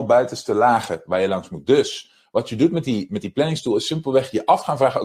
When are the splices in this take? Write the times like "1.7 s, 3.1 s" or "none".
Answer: none